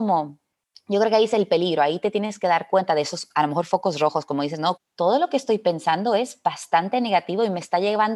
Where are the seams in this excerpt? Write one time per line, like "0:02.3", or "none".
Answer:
0:04.8